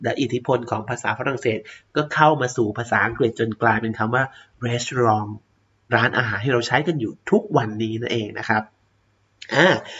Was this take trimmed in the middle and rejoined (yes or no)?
no